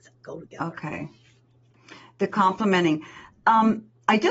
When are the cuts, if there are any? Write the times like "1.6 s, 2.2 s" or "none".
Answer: none